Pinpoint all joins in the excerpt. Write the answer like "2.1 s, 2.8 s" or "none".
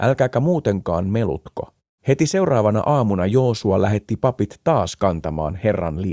2.0 s